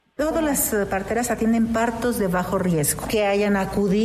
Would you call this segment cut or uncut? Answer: cut